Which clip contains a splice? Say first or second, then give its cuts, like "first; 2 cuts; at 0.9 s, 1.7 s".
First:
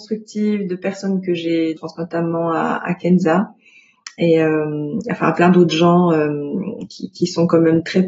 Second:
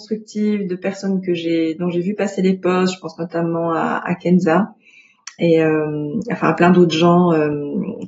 first; 2 cuts; at 1.8 s, 6.9 s